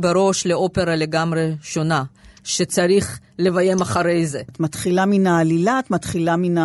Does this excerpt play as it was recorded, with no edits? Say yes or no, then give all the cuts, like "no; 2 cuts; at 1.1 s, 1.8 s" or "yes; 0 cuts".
no; 1 cut; at 4.5 s